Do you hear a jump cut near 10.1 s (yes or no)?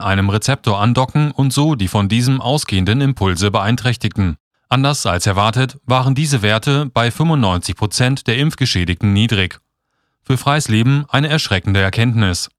yes